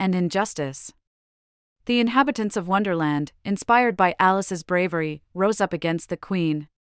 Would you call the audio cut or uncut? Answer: uncut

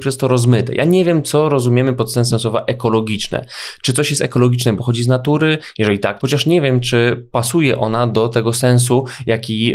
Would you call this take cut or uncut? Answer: cut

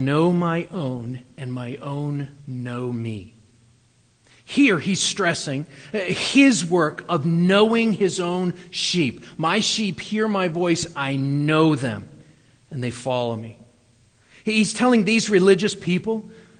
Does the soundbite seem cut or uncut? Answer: uncut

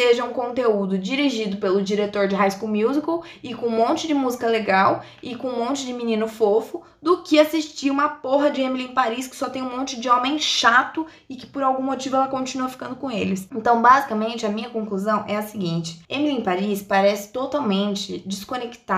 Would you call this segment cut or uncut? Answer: uncut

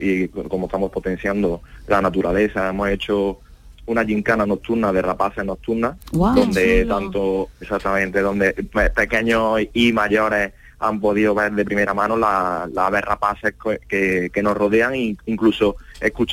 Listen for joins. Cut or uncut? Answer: cut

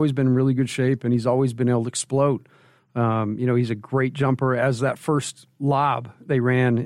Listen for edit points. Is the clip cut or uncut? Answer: uncut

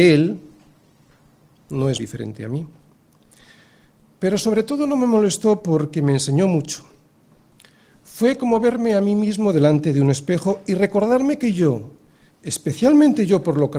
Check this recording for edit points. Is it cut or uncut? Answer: cut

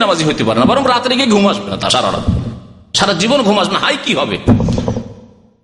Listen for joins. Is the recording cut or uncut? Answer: uncut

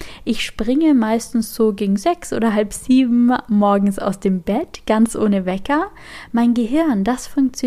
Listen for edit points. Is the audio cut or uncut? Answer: uncut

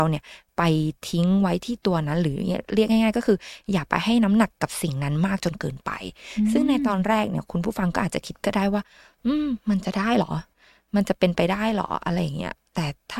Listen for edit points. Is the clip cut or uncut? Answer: uncut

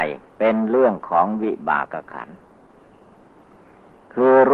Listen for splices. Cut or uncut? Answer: cut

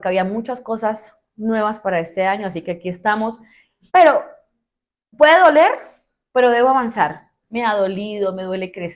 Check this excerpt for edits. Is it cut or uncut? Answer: cut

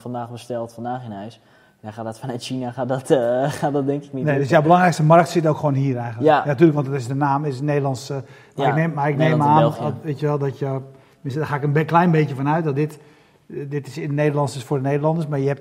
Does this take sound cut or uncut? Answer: uncut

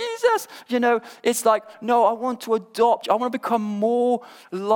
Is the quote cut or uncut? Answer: cut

